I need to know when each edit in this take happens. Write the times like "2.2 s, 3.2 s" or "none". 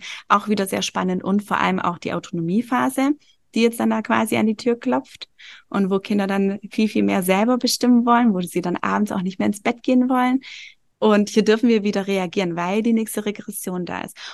10.9 s